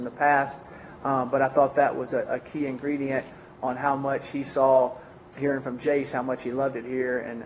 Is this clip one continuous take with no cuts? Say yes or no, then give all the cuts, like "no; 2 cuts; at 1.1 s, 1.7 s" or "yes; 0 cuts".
yes; 0 cuts